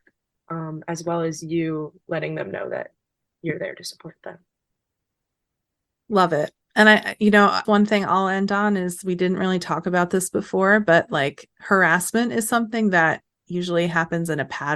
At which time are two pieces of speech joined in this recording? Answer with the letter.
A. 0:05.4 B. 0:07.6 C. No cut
B